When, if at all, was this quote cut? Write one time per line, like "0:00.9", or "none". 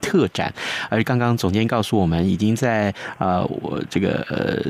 none